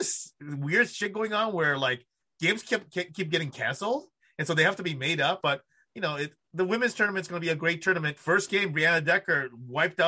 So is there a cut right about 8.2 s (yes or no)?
yes